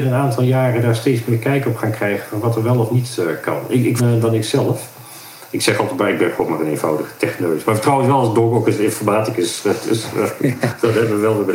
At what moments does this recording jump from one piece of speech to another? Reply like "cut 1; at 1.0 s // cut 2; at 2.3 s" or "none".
cut 1; at 4.0 s